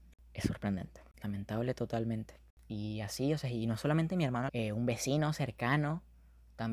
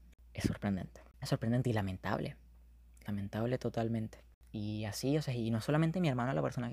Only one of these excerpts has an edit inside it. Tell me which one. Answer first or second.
first